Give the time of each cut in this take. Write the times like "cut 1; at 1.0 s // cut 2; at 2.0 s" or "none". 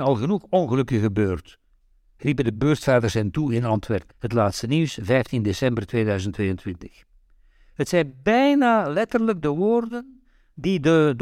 cut 1; at 4.1 s

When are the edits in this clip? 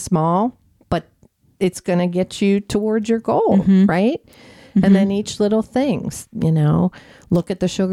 none

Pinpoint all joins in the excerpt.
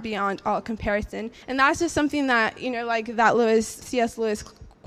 cut 1; at 1.4 s // cut 2; at 3.8 s

